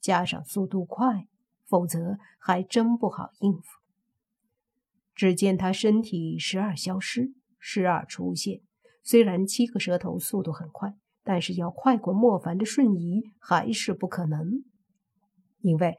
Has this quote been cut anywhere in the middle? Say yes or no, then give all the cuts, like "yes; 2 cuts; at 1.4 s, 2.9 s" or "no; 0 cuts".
no; 0 cuts